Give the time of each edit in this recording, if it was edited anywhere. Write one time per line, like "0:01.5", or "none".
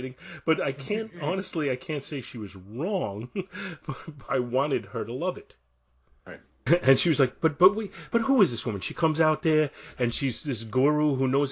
0:04.3
0:06.7
0:10.1